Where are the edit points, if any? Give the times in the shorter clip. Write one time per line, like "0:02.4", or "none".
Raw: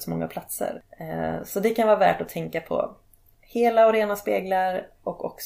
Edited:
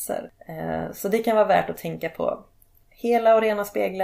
none